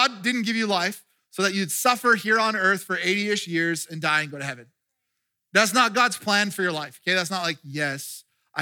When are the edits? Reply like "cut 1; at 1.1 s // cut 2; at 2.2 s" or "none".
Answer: none